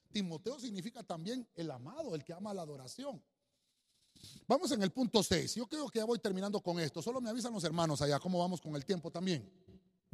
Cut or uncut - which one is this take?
uncut